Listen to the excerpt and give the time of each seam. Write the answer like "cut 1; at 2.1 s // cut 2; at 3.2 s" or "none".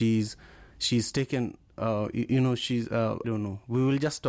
cut 1; at 3.2 s